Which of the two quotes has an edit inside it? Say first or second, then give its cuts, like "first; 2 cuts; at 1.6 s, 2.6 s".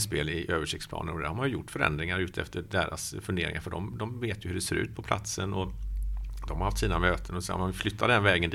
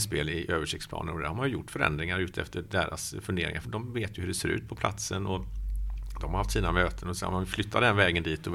second; 1 cut; at 3.6 s